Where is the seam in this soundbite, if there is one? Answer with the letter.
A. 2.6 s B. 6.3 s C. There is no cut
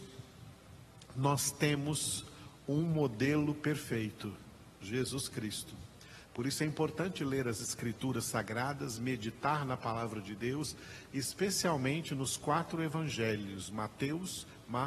B